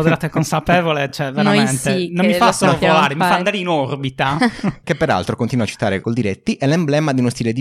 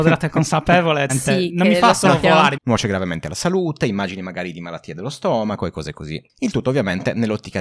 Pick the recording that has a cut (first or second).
second